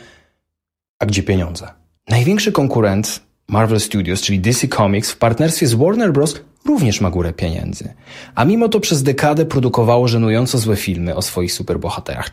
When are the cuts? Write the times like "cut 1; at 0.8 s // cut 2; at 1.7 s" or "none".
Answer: cut 1; at 2.0 s